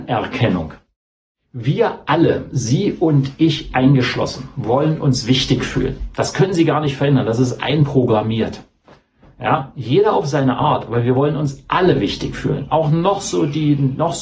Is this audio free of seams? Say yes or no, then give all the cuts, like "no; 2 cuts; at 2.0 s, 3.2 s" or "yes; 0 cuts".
yes; 0 cuts